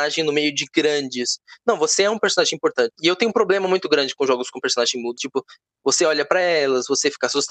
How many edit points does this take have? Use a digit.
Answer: 2